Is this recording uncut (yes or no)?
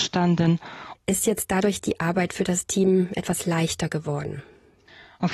no